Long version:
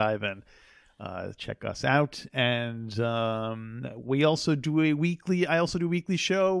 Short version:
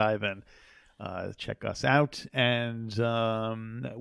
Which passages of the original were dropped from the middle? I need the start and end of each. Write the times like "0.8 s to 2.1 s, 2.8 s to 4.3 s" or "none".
none